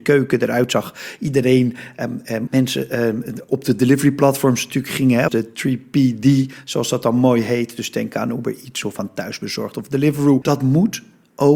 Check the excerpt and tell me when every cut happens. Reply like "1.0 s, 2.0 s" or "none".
2.5 s, 5.3 s, 10.4 s